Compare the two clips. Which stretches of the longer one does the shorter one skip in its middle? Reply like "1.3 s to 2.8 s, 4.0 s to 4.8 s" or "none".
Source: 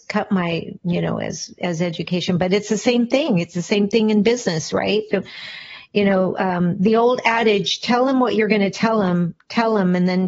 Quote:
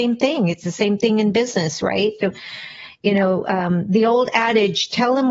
none